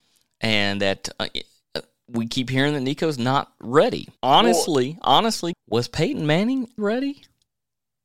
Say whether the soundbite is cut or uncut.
cut